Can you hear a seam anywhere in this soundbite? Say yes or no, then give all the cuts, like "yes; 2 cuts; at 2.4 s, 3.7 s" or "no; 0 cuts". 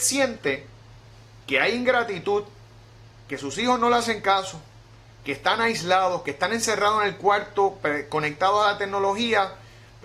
no; 0 cuts